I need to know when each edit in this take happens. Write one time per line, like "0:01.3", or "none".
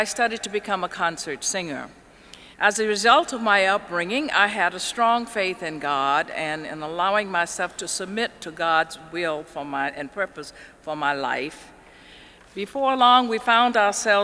0:02.5
0:12.4